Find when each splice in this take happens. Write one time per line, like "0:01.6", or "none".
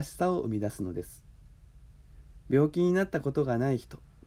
none